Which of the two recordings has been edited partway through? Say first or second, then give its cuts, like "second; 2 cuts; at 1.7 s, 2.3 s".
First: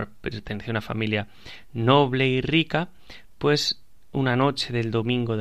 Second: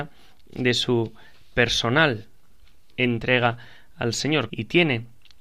second; 1 cut; at 4.5 s